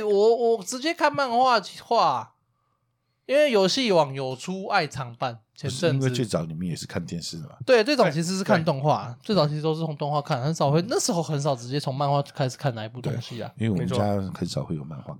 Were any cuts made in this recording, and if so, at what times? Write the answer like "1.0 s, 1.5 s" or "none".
none